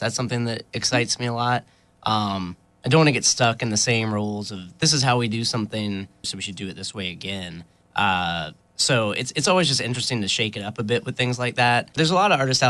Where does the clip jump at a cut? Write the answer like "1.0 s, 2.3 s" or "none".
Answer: 6.2 s